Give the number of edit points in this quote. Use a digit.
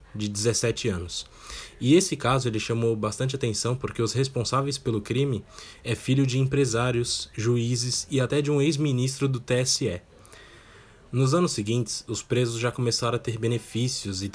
1